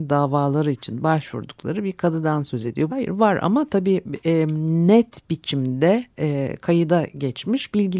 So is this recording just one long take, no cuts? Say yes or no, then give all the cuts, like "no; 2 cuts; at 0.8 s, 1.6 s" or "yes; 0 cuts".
no; 1 cut; at 2.9 s